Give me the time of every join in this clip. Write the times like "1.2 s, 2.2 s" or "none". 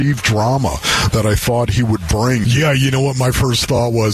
2.4 s